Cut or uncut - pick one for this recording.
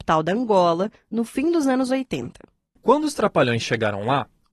uncut